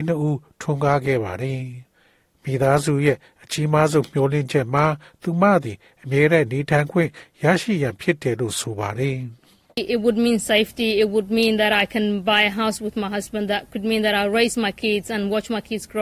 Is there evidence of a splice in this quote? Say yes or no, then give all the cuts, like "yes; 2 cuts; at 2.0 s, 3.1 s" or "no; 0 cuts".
no; 0 cuts